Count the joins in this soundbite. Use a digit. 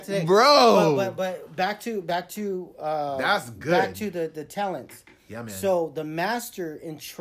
0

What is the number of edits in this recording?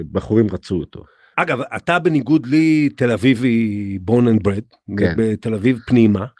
1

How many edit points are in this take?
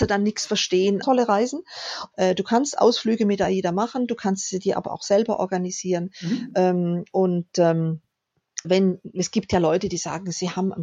3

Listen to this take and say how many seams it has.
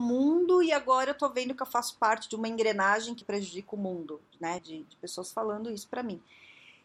2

